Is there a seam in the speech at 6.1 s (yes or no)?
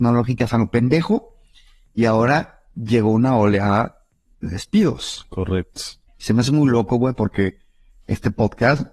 yes